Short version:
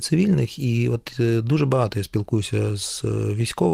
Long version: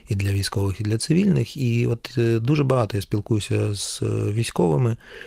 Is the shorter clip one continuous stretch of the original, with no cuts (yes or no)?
yes